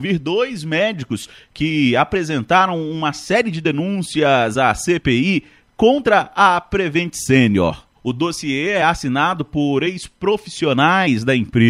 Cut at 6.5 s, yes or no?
no